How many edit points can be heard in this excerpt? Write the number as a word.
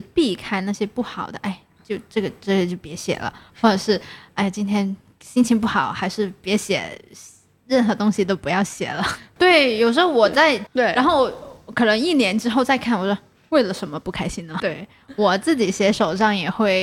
three